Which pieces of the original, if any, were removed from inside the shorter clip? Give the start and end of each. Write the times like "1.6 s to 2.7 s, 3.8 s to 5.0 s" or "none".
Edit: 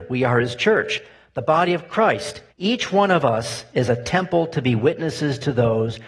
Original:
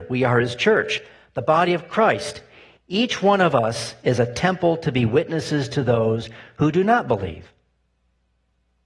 2.5 s to 2.8 s